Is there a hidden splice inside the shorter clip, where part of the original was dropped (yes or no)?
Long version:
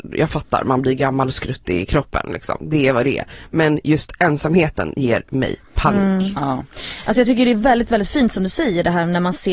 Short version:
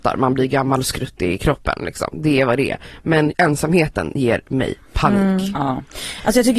yes